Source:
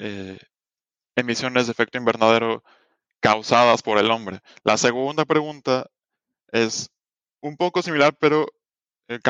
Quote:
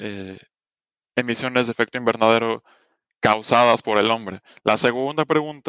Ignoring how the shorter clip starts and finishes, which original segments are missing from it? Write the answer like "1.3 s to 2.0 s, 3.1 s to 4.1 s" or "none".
none